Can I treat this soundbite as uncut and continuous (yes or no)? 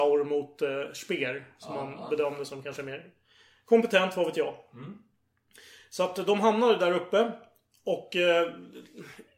yes